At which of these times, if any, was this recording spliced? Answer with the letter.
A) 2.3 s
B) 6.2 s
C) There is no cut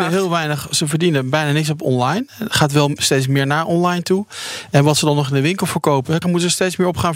B